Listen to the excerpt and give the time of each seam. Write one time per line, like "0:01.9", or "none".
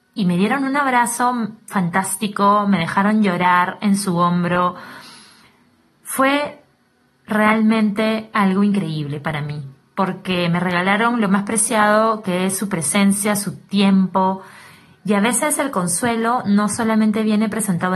none